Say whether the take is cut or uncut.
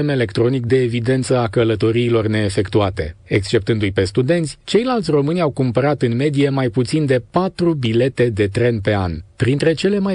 uncut